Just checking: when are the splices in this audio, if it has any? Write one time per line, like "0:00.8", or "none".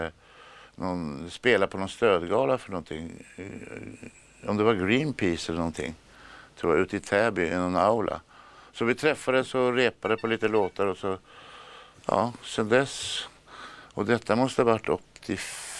none